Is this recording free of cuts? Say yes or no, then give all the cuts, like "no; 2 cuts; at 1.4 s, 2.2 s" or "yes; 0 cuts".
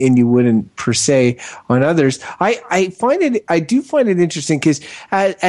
yes; 0 cuts